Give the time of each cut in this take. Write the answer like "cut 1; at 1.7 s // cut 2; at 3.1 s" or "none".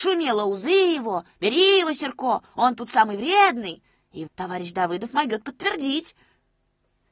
cut 1; at 4.3 s